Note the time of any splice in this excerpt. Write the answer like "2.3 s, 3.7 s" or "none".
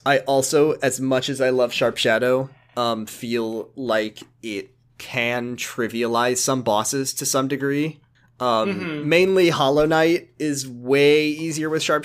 none